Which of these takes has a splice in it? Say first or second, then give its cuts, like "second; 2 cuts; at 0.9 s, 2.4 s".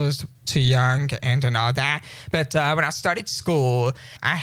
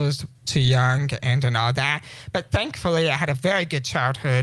first; 1 cut; at 2.3 s